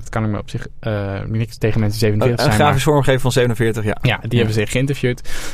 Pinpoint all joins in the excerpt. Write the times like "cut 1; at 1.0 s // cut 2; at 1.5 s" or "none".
none